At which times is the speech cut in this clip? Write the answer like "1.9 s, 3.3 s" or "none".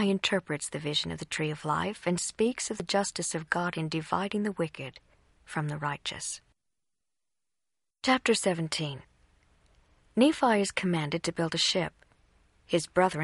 7.9 s